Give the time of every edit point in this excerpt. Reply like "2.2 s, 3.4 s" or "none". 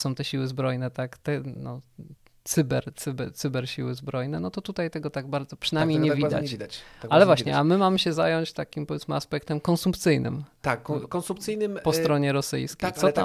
none